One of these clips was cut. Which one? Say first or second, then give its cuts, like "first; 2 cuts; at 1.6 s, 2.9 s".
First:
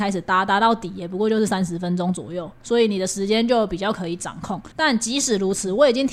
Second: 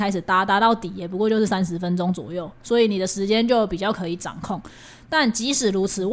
first; 1 cut; at 4.7 s